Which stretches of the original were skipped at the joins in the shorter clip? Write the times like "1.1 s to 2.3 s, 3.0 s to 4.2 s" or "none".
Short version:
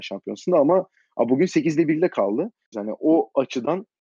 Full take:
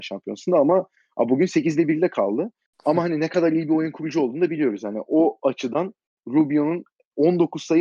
2.7 s to 4.8 s